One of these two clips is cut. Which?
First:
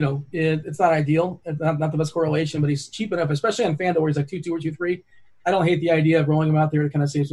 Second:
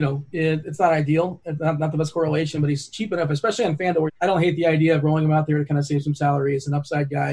second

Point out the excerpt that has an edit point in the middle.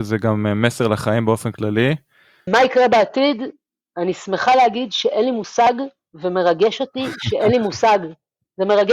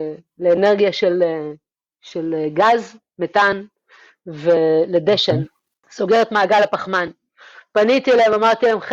first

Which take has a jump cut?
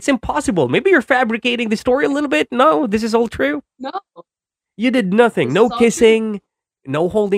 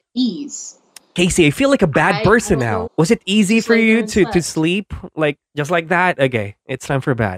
second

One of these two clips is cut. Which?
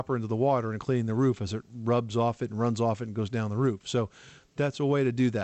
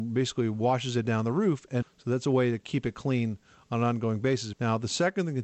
second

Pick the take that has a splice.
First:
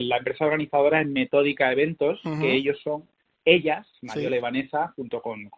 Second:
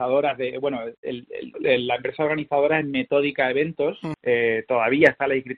second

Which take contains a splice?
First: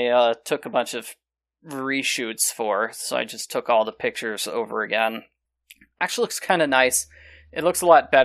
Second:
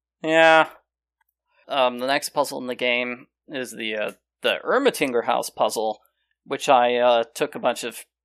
second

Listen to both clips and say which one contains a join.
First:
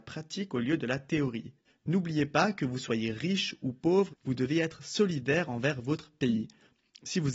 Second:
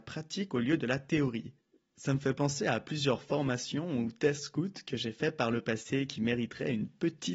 first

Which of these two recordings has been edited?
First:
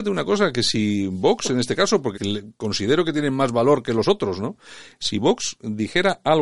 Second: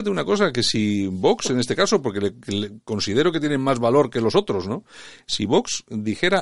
first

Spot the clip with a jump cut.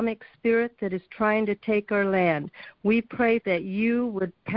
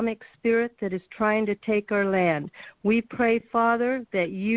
first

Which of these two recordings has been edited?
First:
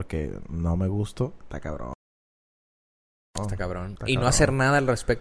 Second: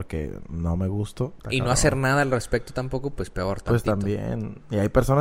second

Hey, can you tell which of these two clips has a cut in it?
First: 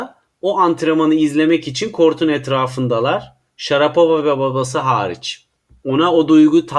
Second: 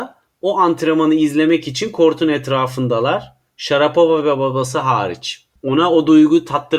second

